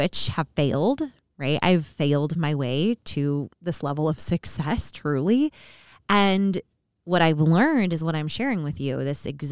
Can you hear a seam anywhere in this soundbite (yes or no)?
yes